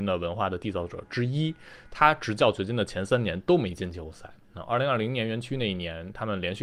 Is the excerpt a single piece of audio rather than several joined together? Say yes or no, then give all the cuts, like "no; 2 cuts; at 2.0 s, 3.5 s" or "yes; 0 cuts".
yes; 0 cuts